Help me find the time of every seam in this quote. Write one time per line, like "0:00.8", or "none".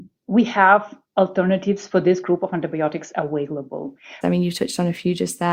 0:04.2